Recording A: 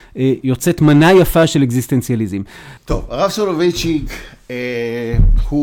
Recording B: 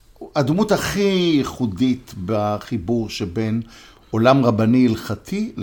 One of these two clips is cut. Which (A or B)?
A